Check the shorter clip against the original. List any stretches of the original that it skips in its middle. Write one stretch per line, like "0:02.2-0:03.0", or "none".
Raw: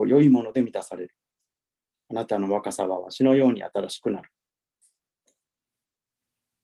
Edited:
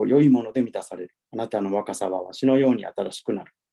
0:01.2-0:02.0